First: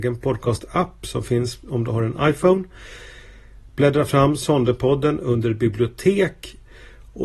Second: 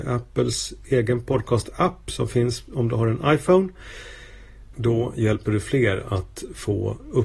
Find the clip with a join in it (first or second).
second